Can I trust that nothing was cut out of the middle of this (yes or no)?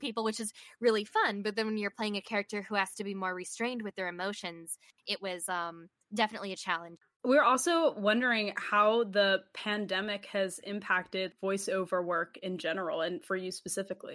no